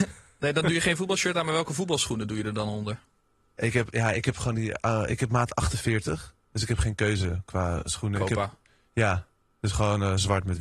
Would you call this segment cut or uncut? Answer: uncut